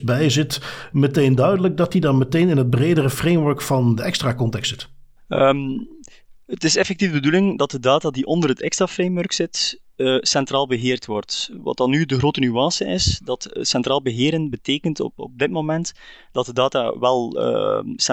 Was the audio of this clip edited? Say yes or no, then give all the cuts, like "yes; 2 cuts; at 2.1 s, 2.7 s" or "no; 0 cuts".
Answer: no; 0 cuts